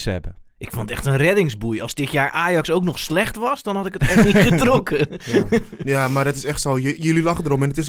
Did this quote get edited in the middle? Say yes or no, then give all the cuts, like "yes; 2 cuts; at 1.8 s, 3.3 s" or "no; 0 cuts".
no; 0 cuts